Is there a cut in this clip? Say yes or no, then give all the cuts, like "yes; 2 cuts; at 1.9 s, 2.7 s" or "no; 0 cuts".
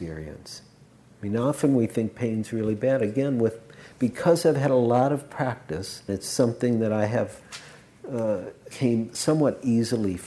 yes; 2 cuts; at 6.1 s, 8.7 s